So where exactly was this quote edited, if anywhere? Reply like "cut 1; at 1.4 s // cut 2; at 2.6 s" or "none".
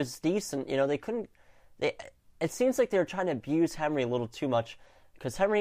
none